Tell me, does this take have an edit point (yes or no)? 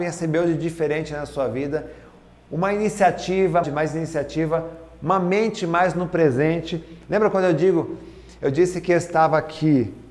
yes